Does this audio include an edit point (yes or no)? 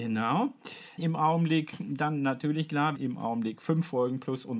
yes